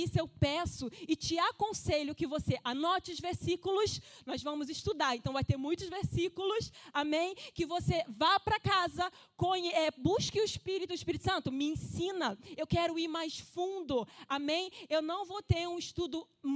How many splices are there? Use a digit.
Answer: 0